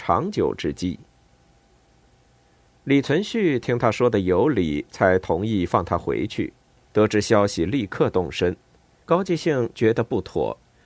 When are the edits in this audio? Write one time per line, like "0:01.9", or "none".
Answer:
0:06.9
0:09.0